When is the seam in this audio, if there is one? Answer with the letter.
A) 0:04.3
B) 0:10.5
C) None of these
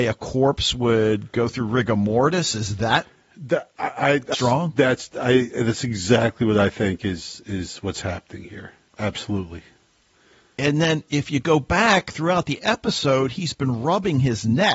A